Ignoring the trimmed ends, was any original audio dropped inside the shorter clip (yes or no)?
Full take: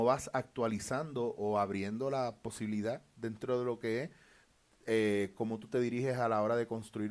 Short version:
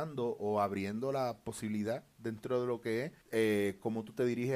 yes